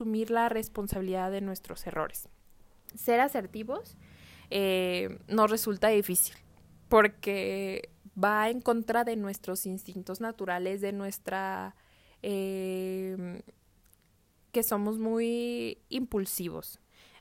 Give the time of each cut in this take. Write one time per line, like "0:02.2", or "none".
0:02.9